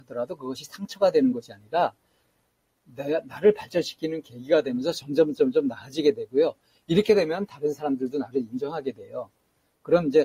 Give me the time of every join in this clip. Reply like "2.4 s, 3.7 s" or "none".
none